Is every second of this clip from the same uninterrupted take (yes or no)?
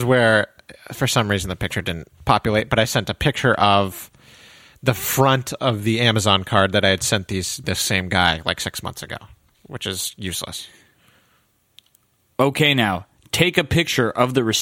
no